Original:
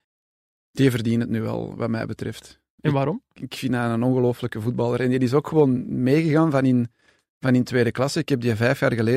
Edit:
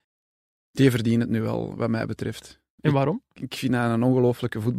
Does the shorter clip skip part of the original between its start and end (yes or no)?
no